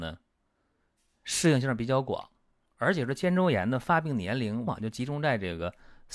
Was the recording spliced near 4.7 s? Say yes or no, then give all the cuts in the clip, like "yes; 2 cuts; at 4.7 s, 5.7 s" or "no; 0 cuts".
yes; 1 cut; at 4.7 s